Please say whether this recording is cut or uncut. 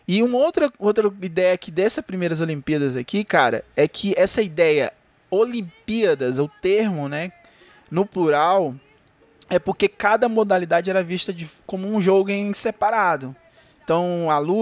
uncut